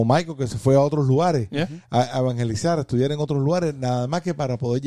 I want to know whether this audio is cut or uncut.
uncut